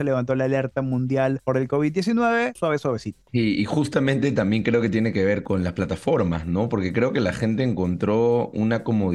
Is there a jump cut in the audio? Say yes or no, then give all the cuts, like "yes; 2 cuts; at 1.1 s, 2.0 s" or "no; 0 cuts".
yes; 1 cut; at 2.6 s